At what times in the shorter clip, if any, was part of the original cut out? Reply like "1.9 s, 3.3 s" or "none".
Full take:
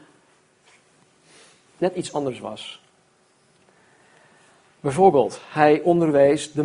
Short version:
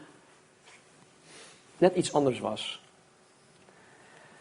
none